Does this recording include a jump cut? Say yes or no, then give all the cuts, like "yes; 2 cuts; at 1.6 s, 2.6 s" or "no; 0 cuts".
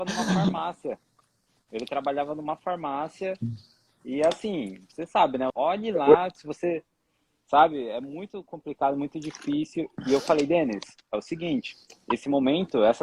yes; 1 cut; at 5.5 s